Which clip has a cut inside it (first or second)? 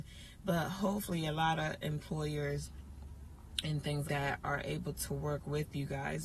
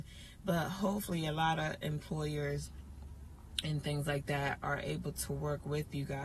first